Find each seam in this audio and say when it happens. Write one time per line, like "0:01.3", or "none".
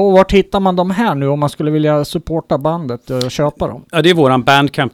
none